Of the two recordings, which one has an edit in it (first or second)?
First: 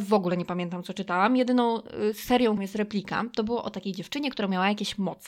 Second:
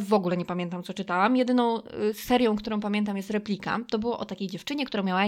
first